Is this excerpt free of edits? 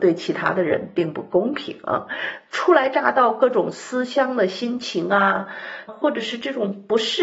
no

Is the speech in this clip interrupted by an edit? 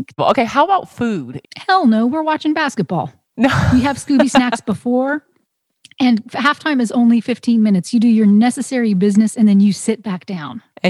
yes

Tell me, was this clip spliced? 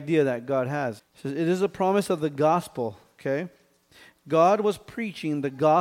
yes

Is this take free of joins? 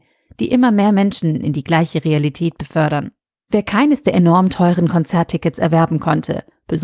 no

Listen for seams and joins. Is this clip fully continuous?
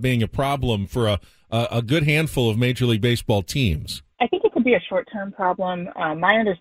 no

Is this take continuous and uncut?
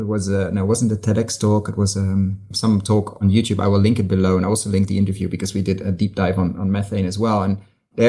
yes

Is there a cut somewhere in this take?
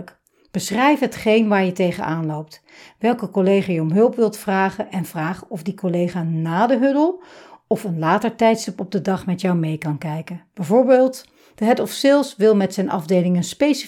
no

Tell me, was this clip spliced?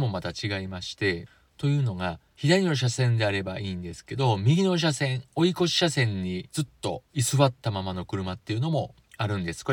no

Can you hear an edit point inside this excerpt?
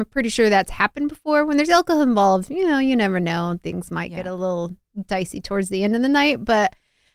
no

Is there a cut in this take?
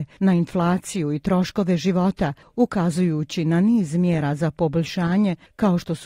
no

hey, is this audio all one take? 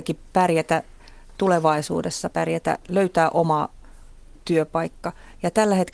no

